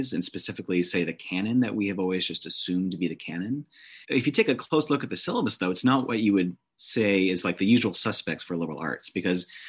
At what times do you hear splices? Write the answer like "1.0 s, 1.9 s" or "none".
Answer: 4.0 s